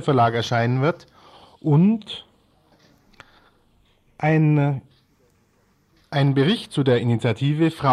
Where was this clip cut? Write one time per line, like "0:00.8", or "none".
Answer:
none